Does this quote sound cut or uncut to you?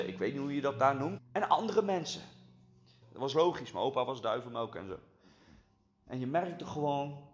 cut